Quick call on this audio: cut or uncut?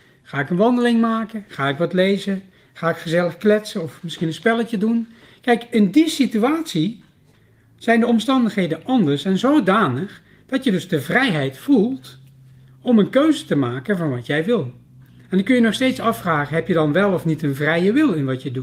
uncut